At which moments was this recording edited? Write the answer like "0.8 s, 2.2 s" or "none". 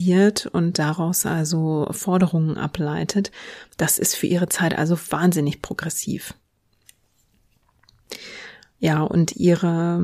none